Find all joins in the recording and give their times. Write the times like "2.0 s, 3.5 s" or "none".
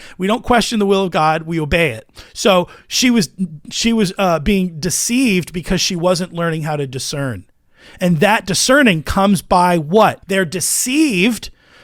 10.2 s

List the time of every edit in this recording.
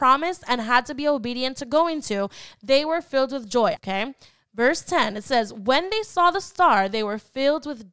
3.8 s

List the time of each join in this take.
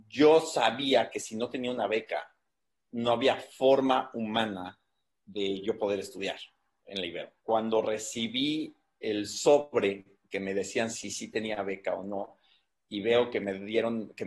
none

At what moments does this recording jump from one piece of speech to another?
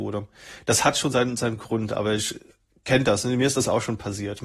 none

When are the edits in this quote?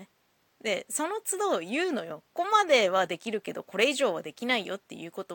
2.3 s

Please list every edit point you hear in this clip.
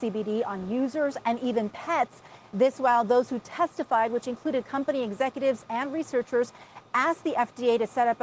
2.5 s, 5.7 s

